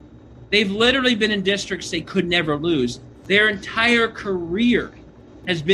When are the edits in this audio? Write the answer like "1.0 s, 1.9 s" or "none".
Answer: none